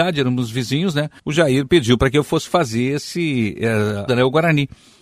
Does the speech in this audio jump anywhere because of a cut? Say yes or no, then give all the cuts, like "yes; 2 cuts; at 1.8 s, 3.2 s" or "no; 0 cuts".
yes; 2 cuts; at 1.2 s, 4.1 s